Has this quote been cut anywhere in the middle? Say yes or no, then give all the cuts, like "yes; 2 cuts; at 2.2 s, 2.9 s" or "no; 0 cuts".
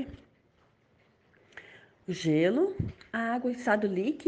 no; 0 cuts